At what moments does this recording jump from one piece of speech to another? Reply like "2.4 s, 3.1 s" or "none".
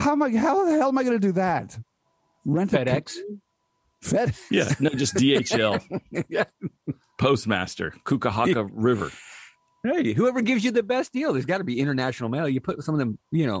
none